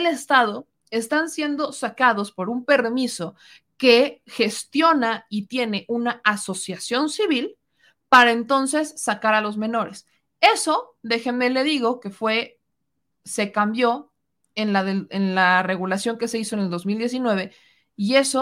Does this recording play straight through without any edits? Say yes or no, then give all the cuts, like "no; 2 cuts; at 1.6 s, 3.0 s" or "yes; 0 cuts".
yes; 0 cuts